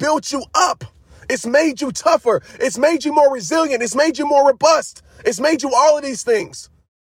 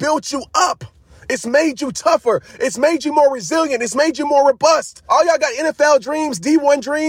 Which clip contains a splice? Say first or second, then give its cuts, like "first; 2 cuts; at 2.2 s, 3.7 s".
second; 1 cut; at 5.1 s